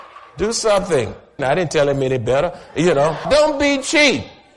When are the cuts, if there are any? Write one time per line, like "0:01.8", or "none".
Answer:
0:01.4
0:03.2